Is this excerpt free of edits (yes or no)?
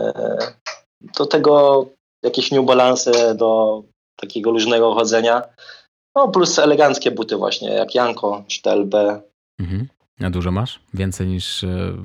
yes